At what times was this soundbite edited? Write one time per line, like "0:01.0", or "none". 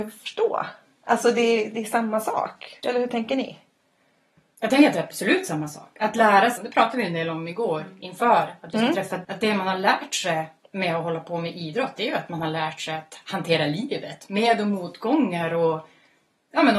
0:06.6
0:09.2